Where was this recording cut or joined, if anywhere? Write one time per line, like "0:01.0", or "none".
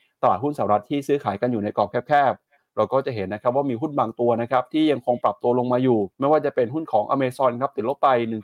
0:06.1